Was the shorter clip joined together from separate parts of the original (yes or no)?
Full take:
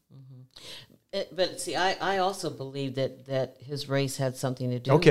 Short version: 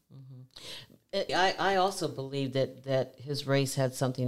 yes